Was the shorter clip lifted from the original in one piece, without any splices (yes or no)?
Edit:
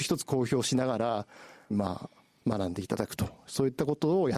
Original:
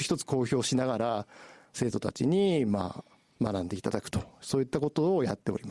no